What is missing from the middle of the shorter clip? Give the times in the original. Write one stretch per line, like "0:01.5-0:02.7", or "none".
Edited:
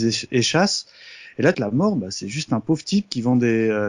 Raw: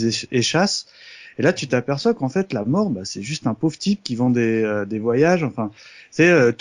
0:01.5-0:02.5